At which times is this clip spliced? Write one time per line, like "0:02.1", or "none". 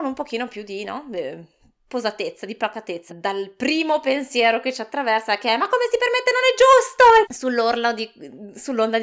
0:03.1
0:07.2